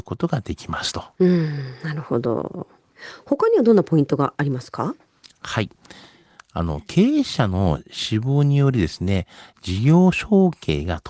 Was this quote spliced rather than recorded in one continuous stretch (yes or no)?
no